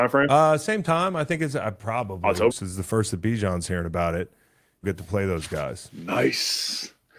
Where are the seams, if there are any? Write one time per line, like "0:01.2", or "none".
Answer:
0:02.5
0:04.8